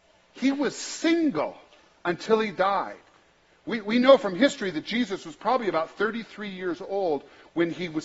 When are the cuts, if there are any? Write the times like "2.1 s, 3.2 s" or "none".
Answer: none